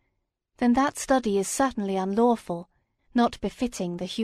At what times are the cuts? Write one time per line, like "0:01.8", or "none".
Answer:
0:03.0